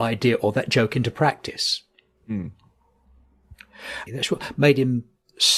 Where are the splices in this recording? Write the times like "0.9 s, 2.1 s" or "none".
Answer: 4.1 s